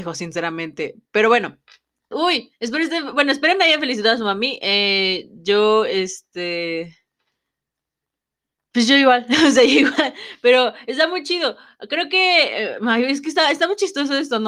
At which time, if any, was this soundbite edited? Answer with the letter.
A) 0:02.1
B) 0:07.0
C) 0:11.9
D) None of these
A